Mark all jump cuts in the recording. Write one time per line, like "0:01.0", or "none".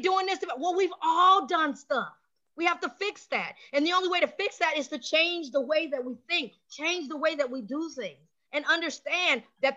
0:02.5